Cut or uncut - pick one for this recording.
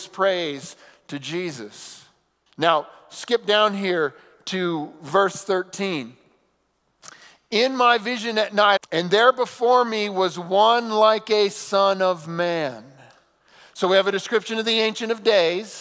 cut